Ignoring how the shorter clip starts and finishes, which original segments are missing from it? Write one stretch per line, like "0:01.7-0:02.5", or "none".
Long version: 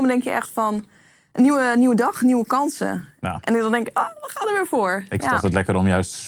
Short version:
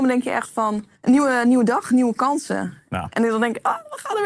0:00.9-0:01.2